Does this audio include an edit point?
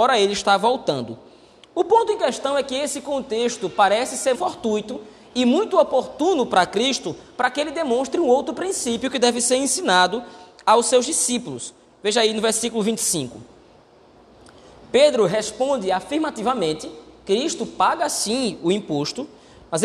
yes; 1 cut; at 4.3 s

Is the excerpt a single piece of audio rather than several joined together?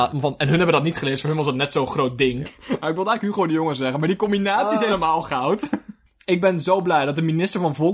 no; 2 cuts; at 2.5 s, 6.1 s

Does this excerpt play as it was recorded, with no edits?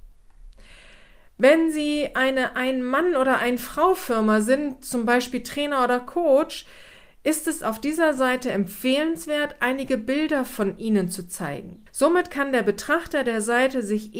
no; 1 cut; at 11.9 s

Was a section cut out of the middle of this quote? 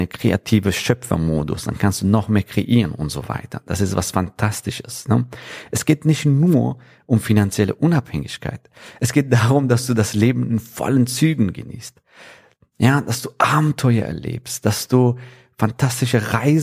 no; 0 cuts

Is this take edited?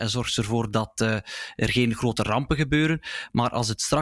no; 0 cuts

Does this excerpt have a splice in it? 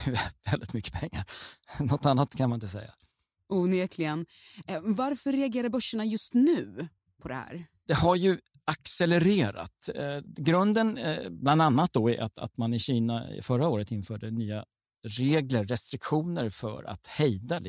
no; 0 cuts

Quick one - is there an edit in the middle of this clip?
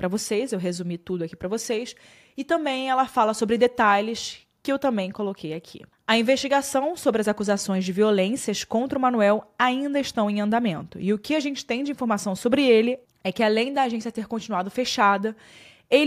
no; 0 cuts

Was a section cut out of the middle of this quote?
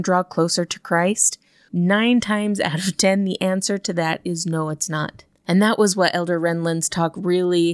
yes; 1 cut; at 1.7 s

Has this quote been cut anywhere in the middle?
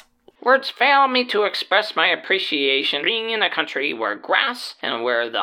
yes; 1 cut; at 3.0 s

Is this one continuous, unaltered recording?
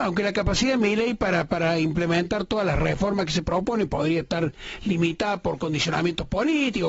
yes; 0 cuts

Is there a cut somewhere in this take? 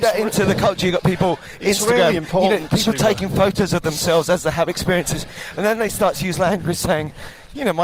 no; 0 cuts

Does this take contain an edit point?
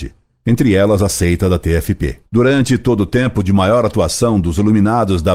yes; 1 cut; at 2.2 s

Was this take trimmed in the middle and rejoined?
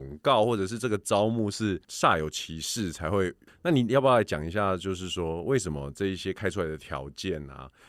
yes; 1 cut; at 3.5 s

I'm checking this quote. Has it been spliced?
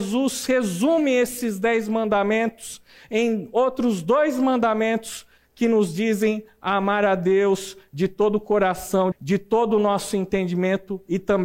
yes; 1 cut; at 9.1 s

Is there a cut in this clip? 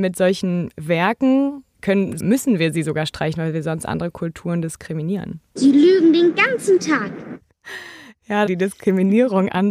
yes; 3 cuts; at 2.2 s, 5.6 s, 8.5 s

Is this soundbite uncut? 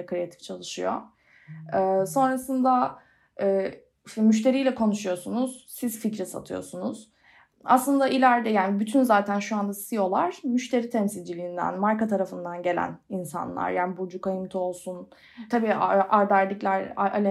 no; 1 cut; at 15.5 s

